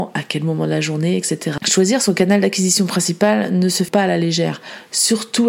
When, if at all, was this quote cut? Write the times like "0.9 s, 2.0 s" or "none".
1.6 s, 3.9 s

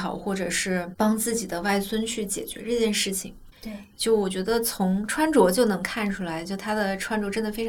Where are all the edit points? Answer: 3.5 s

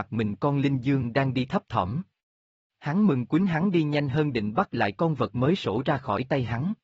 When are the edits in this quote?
none

